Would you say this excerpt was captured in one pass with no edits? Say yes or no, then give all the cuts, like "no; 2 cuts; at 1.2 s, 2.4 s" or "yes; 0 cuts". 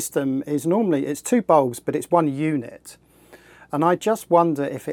yes; 0 cuts